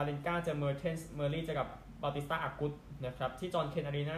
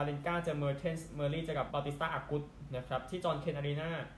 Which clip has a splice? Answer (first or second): second